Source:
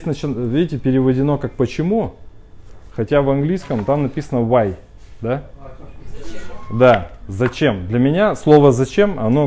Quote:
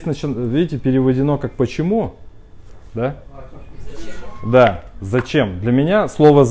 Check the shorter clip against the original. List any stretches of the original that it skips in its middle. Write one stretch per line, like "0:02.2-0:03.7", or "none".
0:02.9-0:05.2